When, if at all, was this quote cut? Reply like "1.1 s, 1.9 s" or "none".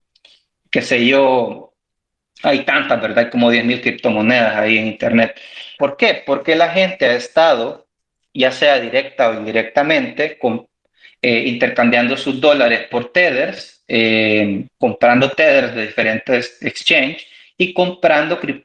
5.8 s